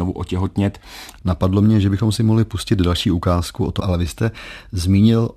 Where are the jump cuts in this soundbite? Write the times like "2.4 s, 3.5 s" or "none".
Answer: 1.2 s, 3.8 s